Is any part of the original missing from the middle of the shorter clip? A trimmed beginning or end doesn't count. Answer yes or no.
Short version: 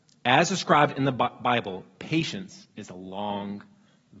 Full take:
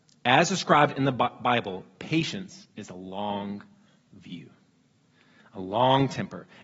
no